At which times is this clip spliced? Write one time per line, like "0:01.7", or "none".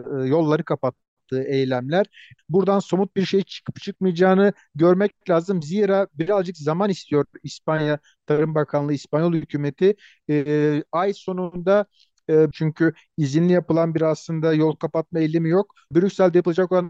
0:02.4
0:12.5
0:15.9